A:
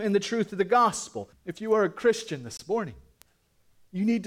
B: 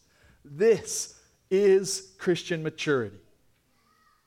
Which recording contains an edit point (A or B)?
A